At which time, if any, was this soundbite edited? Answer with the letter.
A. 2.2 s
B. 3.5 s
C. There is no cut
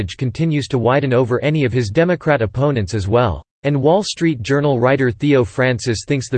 B